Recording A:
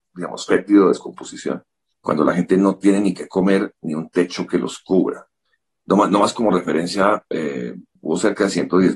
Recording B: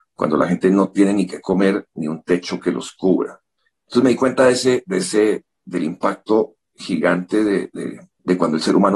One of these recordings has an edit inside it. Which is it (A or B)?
A